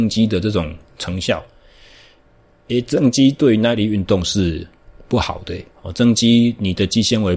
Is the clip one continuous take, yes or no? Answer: no